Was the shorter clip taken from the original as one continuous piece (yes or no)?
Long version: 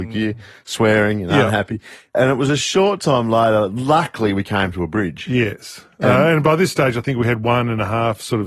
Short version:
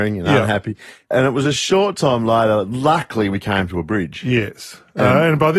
yes